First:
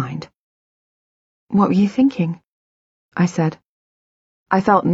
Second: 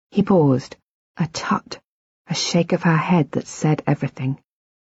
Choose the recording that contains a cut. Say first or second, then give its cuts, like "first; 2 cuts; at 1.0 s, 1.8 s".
second; 1 cut; at 1.1 s